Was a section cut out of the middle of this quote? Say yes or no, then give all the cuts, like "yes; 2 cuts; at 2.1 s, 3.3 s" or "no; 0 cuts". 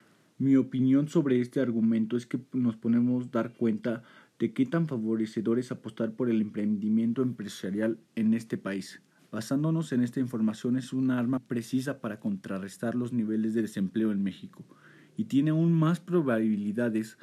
yes; 1 cut; at 11.4 s